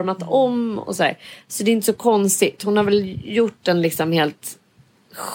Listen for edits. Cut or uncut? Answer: uncut